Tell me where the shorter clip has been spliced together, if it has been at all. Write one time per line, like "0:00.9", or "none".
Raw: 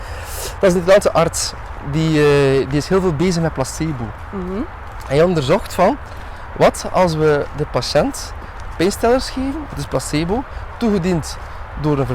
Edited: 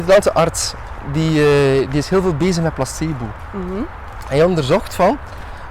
none